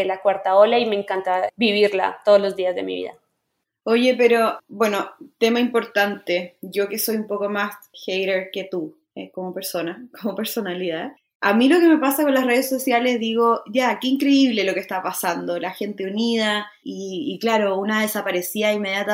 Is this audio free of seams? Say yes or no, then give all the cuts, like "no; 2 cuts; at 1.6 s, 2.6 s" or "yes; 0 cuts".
no; 1 cut; at 16.8 s